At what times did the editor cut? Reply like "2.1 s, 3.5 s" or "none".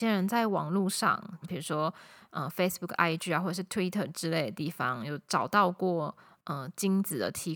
1.4 s

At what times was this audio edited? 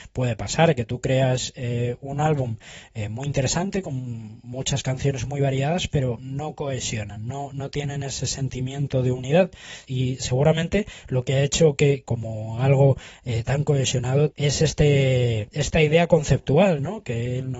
9.8 s, 12.0 s, 14.3 s

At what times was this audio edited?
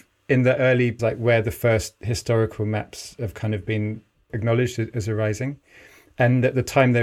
1.0 s, 4.3 s

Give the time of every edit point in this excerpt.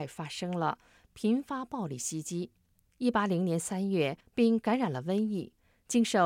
2.9 s, 4.2 s

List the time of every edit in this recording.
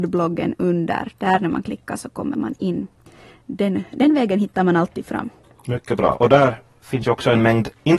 none

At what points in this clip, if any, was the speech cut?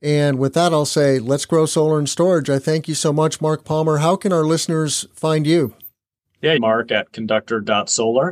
6.6 s

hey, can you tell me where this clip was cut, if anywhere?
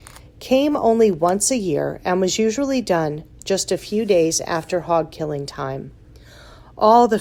none

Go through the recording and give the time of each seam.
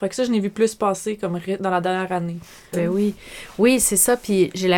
2.7 s

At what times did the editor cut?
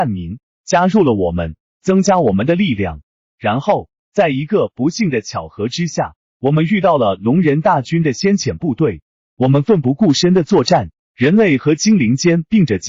none

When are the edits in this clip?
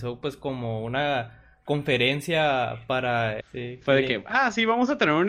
3.4 s

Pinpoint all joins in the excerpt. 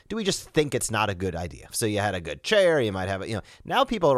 1.7 s

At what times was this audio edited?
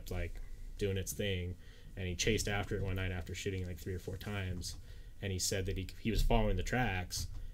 none

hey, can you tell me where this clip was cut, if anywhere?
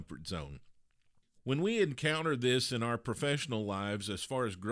1.4 s

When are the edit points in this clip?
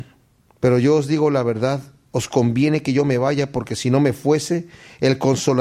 none

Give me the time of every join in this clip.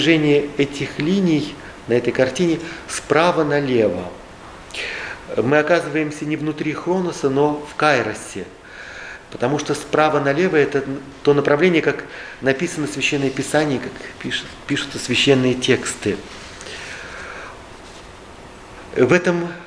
none

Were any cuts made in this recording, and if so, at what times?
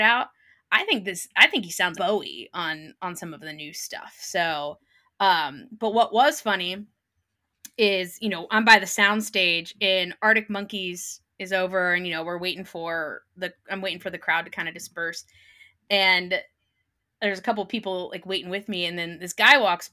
1.9 s

